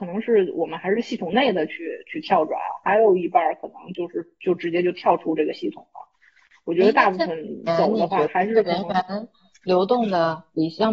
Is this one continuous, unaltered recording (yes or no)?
yes